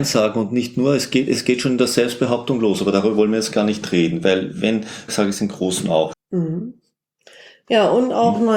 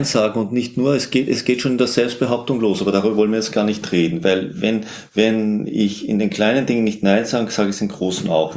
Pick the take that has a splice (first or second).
first